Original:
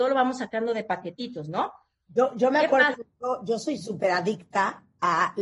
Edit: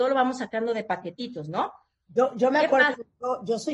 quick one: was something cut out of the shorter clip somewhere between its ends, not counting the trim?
no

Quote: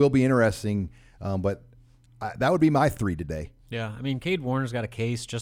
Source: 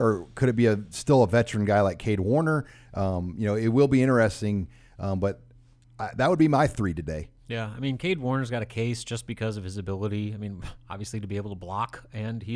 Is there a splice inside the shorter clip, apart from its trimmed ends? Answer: no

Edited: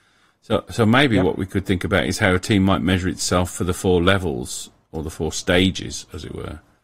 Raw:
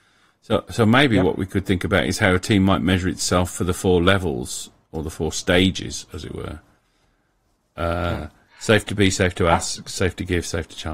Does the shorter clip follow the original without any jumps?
yes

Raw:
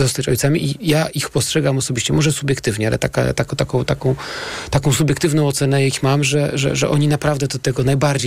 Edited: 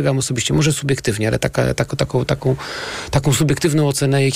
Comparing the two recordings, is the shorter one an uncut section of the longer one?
yes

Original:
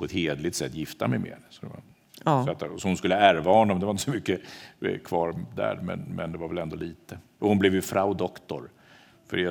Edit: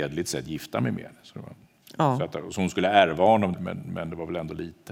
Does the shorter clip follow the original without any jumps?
no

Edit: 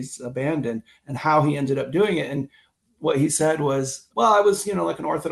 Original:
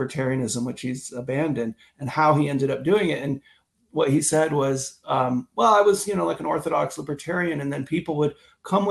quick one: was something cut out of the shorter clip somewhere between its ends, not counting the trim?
yes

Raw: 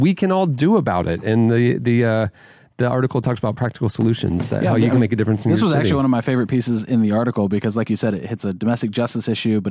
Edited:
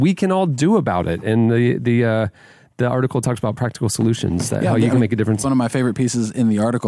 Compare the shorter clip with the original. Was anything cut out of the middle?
yes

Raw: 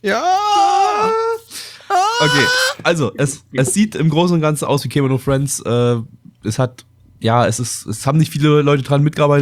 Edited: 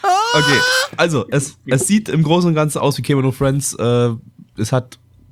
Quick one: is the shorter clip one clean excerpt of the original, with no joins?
yes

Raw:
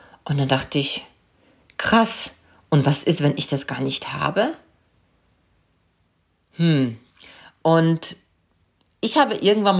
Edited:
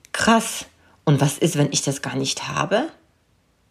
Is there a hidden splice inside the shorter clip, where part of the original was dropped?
no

